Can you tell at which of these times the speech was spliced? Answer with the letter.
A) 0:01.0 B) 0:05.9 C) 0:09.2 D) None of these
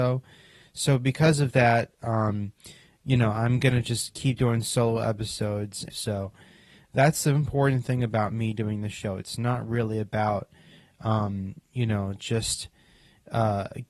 B